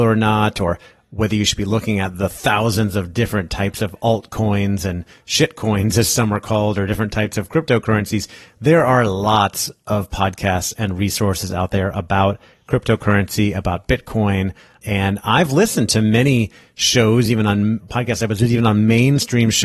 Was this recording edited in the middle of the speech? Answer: no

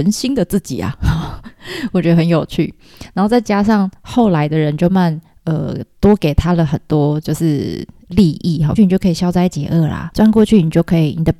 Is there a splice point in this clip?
yes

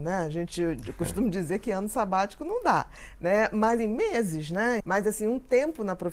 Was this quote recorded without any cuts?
no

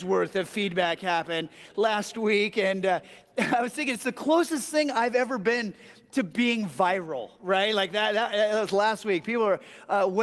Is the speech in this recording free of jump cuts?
yes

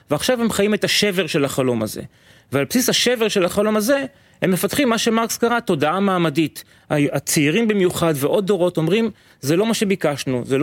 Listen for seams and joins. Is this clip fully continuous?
yes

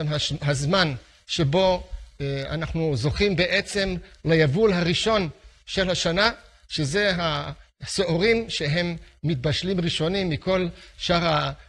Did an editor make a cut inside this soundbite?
no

